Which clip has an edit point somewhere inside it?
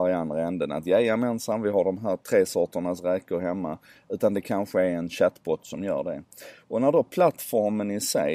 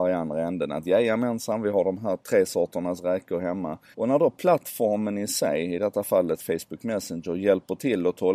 second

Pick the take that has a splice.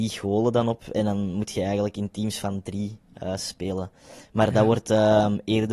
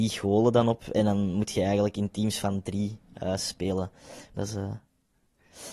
second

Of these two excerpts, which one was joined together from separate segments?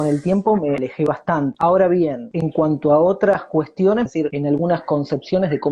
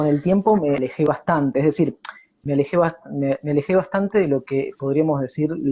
first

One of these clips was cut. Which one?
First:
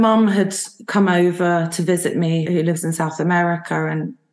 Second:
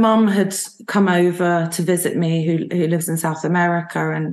first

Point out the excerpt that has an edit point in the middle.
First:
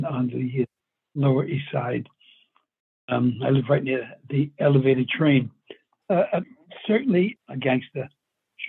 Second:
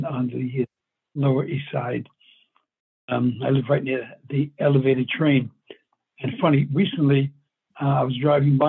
first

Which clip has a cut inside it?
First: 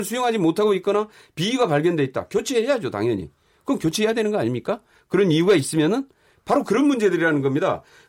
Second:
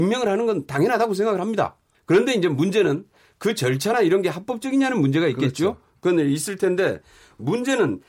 second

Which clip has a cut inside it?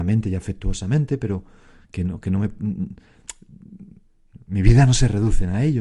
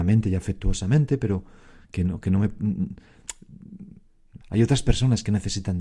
second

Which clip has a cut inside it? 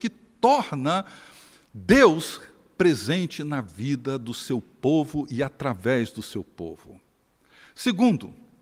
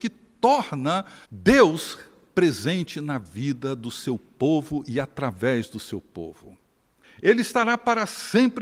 second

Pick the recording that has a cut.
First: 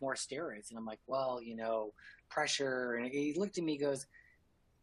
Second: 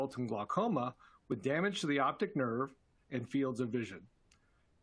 second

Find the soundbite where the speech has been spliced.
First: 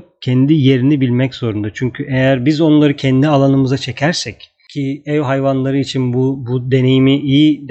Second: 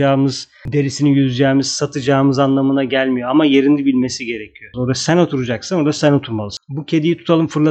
second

